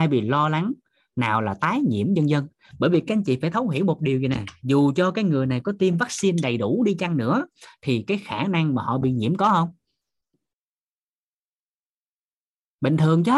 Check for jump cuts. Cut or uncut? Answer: uncut